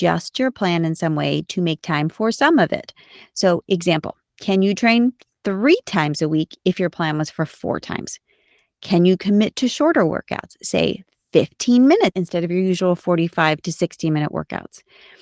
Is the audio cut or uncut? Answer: cut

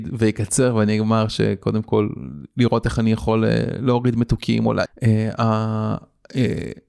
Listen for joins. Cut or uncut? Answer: cut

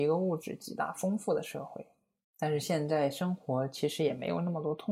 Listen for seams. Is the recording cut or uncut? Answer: cut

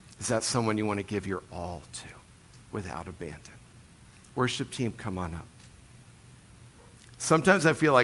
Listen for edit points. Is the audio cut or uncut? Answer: uncut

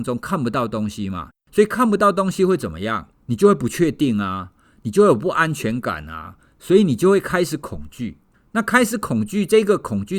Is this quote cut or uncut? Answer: uncut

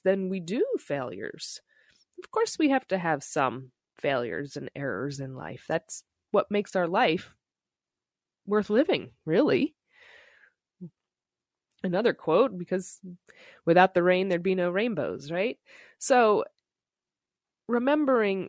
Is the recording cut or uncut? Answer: cut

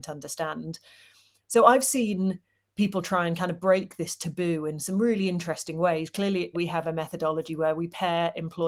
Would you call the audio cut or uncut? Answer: cut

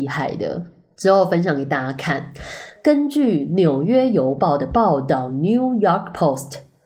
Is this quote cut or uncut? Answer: uncut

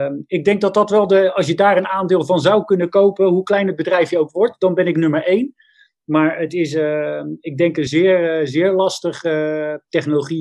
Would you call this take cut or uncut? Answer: uncut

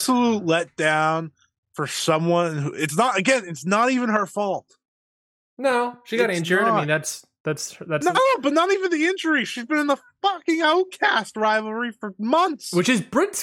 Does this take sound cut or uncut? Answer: uncut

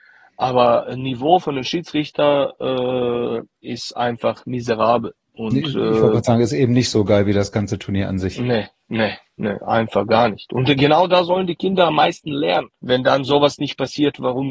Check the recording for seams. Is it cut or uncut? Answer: cut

